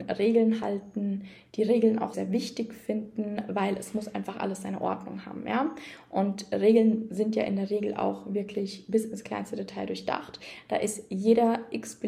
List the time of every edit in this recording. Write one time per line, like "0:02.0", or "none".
0:02.1